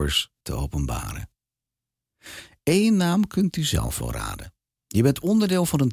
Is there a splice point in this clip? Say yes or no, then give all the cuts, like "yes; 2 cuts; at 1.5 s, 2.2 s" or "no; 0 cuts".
yes; 1 cut; at 4.7 s